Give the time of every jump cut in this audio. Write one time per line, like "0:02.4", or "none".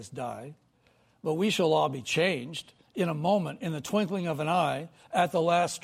none